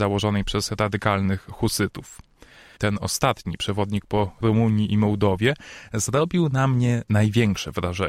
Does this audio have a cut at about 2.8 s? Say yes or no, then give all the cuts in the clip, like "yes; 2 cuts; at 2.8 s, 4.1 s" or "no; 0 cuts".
yes; 1 cut; at 2.8 s